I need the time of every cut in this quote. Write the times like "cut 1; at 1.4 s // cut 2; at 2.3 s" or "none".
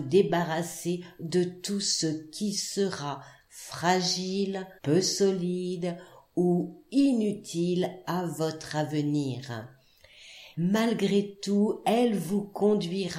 cut 1; at 4.8 s // cut 2; at 10.5 s